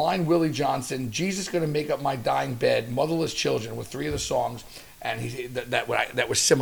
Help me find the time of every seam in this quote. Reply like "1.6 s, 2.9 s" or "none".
none